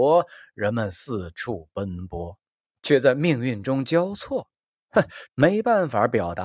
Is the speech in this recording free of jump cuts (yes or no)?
no